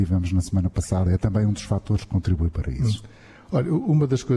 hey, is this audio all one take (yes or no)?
yes